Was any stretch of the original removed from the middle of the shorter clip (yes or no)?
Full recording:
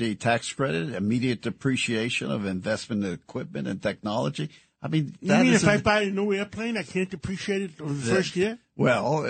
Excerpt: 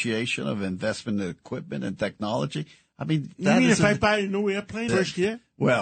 yes